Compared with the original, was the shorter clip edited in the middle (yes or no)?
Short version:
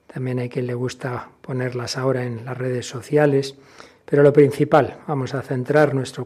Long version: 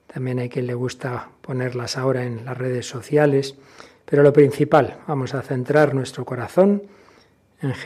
no